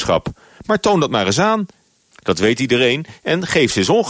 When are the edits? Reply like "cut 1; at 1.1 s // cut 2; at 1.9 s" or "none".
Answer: cut 1; at 2.1 s